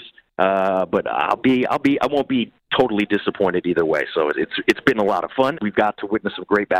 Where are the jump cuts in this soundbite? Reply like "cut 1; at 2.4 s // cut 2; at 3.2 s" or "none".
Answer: cut 1; at 4.3 s // cut 2; at 5.5 s